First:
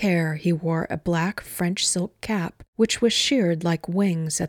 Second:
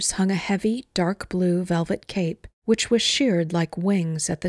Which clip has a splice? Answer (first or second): second